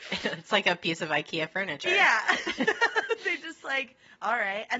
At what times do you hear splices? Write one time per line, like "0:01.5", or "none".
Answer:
none